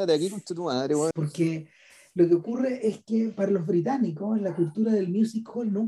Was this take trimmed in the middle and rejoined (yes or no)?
yes